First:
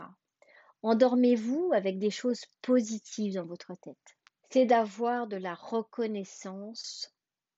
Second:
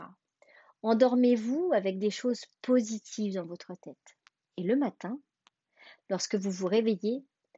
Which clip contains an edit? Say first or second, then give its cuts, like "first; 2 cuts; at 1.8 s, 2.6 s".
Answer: first; 1 cut; at 4.4 s